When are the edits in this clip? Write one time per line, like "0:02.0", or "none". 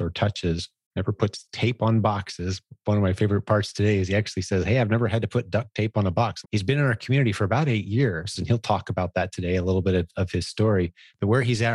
0:06.4
0:08.3